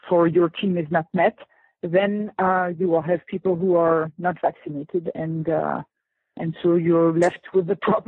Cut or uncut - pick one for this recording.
uncut